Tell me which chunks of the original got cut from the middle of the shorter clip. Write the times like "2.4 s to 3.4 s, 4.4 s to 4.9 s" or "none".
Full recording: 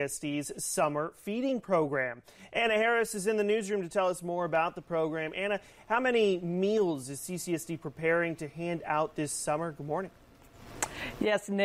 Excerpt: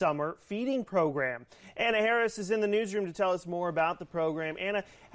none